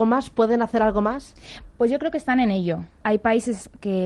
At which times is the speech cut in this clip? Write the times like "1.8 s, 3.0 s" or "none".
3.0 s